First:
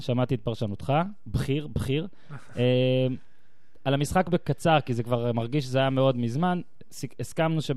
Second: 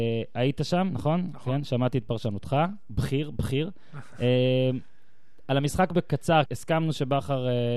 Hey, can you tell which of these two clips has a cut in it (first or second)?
second